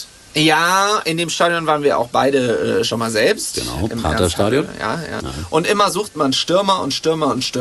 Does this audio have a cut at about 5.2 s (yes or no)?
yes